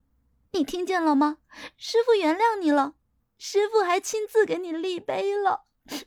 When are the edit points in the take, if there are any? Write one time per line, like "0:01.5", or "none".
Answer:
0:03.2

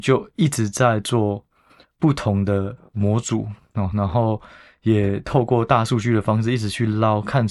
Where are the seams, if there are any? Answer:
none

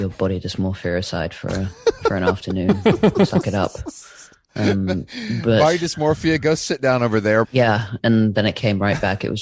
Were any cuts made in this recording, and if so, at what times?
0:07.4

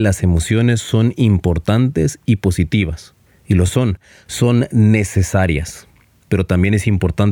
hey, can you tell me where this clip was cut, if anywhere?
none

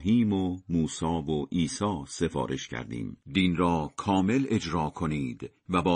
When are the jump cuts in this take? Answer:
0:03.2

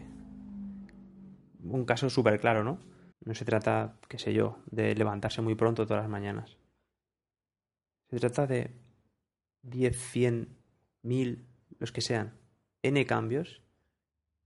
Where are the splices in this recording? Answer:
0:03.1

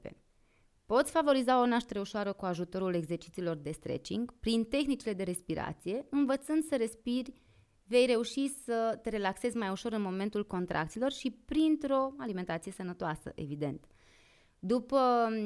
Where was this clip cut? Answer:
none

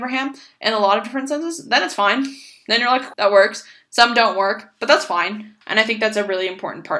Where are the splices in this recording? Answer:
0:03.1
0:05.6

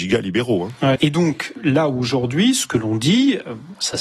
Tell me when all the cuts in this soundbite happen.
0:01.0

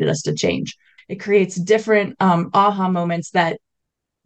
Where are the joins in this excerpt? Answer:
0:01.0

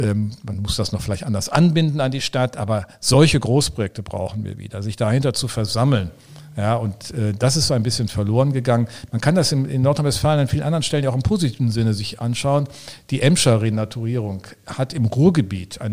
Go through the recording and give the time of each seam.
none

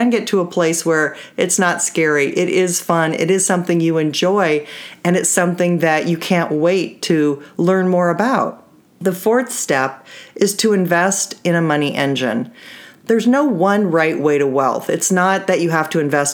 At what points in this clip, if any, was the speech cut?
none

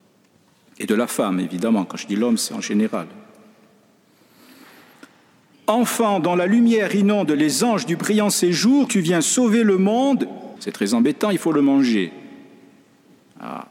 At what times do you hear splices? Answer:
0:08.9
0:10.6

